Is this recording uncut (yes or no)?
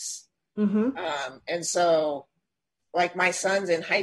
yes